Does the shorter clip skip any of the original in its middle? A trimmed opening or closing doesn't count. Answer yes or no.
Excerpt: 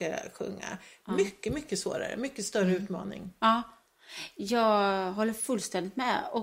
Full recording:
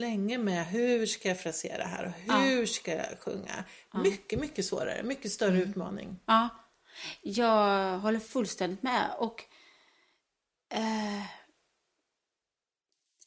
no